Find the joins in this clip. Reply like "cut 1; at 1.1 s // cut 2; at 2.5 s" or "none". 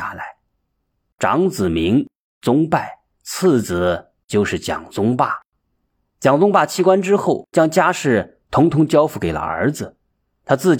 cut 1; at 1.1 s